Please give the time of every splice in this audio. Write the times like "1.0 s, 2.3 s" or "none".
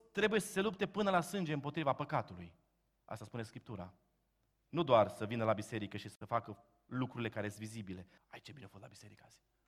8.2 s